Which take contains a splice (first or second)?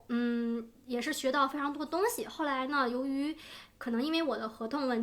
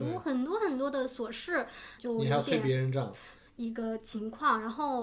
second